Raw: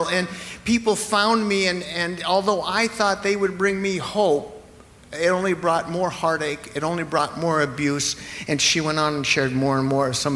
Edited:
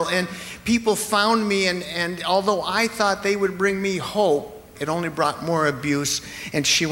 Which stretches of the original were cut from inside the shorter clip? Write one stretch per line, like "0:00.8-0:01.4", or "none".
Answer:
0:04.7-0:06.7